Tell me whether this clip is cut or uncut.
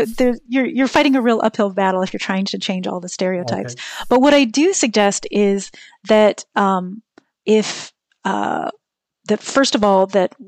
uncut